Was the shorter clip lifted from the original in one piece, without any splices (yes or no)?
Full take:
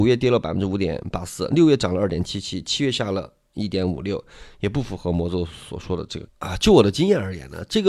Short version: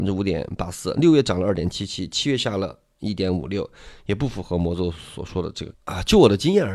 yes